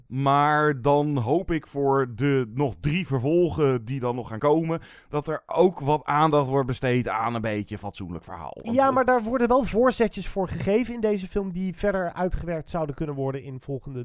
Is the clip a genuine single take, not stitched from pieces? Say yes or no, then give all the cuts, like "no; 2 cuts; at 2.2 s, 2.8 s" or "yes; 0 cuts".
yes; 0 cuts